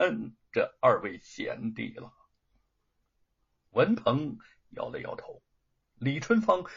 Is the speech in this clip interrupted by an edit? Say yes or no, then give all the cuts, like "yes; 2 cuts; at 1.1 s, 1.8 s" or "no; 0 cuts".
no; 0 cuts